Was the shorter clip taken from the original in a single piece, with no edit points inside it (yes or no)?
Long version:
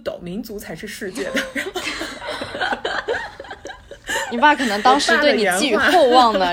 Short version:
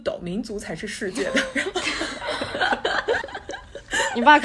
no